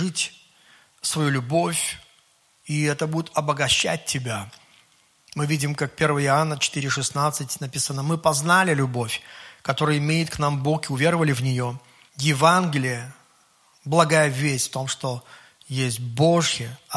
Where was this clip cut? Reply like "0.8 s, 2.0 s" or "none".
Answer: 12.1 s